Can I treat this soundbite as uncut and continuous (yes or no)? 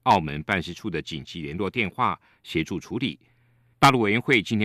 no